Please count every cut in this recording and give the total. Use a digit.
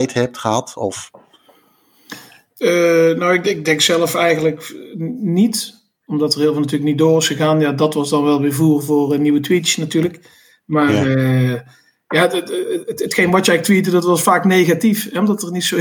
0